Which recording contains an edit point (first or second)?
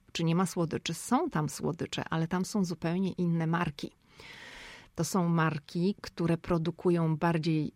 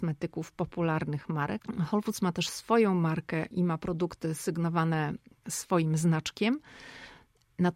second